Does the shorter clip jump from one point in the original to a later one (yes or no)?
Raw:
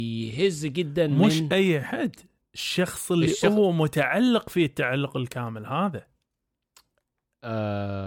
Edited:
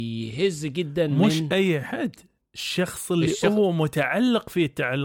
no